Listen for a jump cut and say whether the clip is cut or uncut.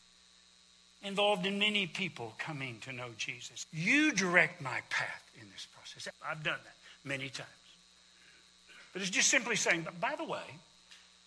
cut